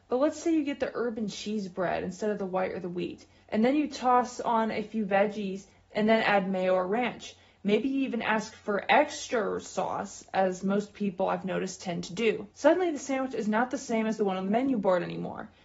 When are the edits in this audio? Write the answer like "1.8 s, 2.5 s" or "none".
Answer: 3.4 s, 12.5 s